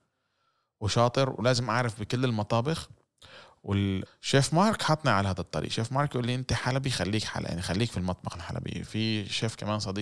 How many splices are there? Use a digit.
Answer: 1